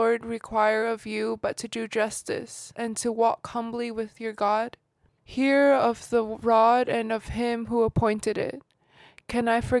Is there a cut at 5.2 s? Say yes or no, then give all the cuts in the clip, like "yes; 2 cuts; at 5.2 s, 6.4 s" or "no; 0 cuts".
yes; 2 cuts; at 2.7 s, 5.2 s